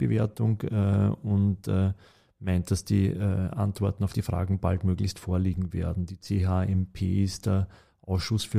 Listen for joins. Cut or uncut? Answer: uncut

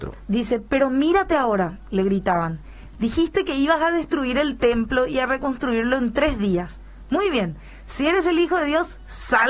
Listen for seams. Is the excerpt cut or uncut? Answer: uncut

